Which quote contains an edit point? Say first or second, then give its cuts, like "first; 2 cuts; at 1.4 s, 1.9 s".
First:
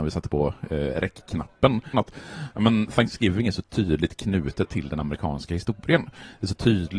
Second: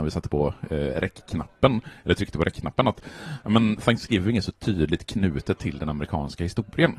first; 1 cut; at 1.9 s